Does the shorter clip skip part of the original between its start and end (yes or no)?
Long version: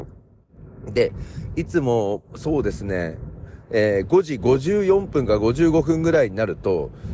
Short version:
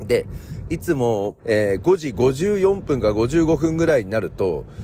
yes